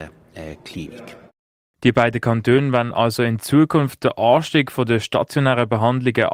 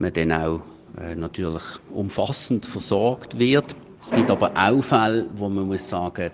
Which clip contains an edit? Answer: second; 1 cut; at 3.9 s

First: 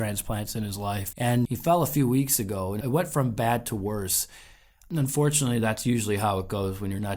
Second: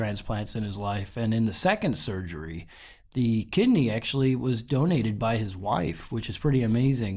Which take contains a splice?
first; 1 cut; at 1.1 s

